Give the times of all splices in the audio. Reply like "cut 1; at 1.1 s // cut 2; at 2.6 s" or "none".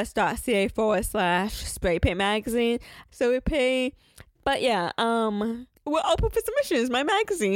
cut 1; at 3.1 s // cut 2; at 4.4 s // cut 3; at 5.8 s